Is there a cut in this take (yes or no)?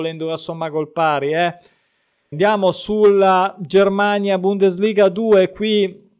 yes